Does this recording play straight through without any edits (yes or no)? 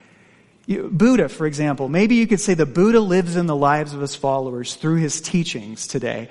yes